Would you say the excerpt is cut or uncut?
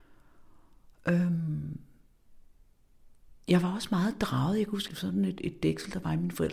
cut